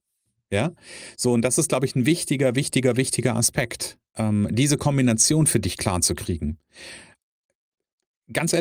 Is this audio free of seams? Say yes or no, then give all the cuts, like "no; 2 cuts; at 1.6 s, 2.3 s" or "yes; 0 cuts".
yes; 0 cuts